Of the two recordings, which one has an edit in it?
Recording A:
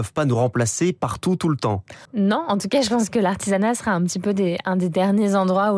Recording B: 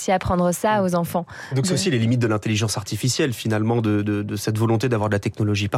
A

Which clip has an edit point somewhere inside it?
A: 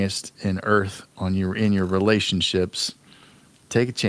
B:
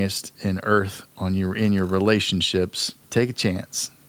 B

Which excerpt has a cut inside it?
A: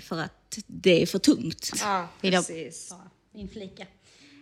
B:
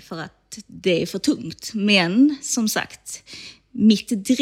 A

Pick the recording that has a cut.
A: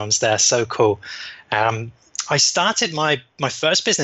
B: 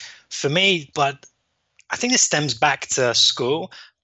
B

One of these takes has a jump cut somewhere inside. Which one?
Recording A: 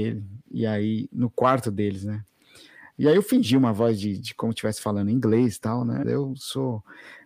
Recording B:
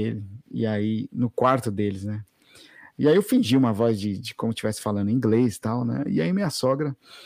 A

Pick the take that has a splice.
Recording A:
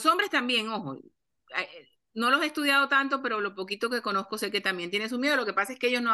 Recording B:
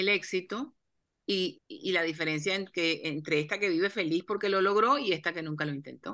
B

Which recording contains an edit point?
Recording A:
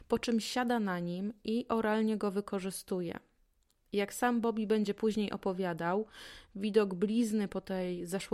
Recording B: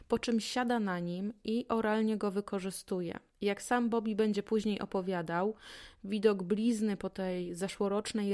B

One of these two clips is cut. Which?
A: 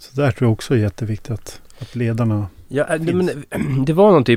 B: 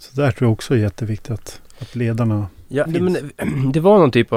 B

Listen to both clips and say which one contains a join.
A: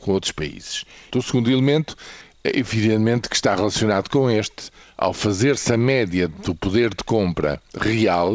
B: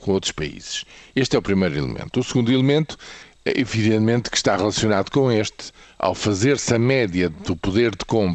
A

